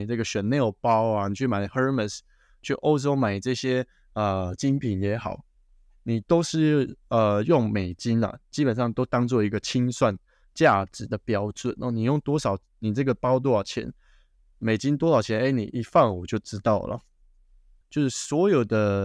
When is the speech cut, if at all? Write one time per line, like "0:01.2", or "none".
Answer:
0:17.8